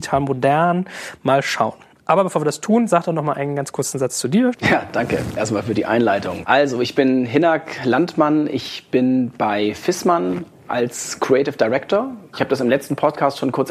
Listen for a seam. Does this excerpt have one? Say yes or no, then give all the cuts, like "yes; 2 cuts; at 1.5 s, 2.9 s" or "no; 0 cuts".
yes; 1 cut; at 4.5 s